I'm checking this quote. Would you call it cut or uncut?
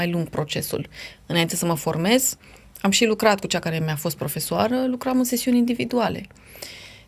uncut